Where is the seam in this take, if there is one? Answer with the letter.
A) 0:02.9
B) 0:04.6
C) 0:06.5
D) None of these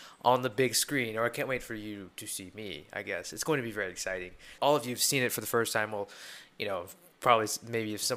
B